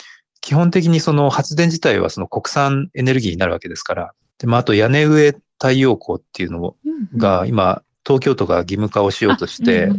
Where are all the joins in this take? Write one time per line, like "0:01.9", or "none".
0:04.3